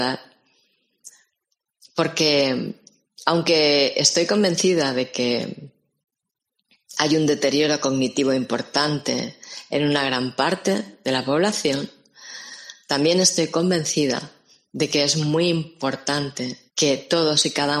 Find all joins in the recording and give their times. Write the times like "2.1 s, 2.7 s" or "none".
16.7 s